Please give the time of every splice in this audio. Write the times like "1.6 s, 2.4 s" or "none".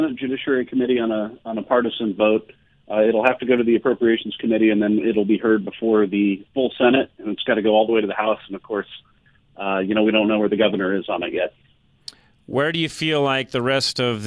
none

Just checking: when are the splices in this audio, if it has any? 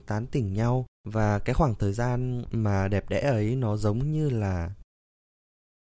0.9 s

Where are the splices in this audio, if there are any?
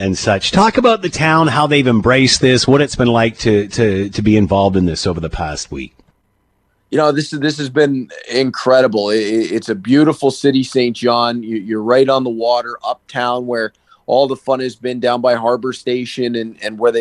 none

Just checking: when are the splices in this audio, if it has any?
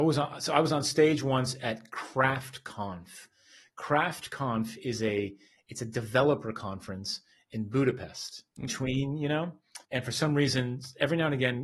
8.7 s, 9.8 s

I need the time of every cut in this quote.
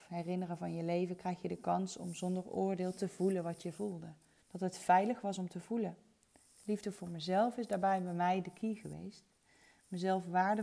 4.4 s

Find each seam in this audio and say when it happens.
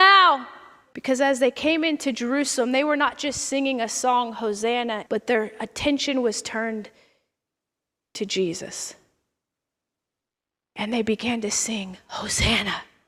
0.9 s, 5.1 s

